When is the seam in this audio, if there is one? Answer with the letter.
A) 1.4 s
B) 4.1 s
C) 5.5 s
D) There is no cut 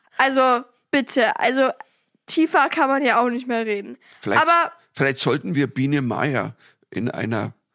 D